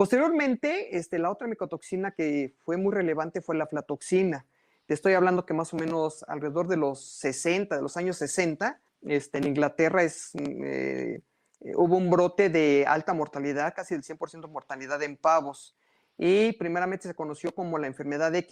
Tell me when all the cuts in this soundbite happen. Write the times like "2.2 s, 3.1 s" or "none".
8.9 s